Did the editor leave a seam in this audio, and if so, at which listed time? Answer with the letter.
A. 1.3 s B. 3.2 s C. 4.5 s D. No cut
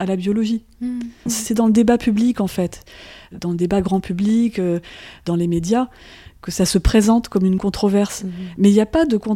A